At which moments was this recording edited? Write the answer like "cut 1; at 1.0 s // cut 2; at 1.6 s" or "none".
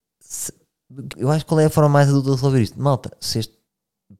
cut 1; at 1.1 s

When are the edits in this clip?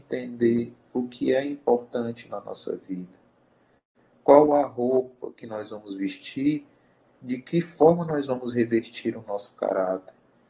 none

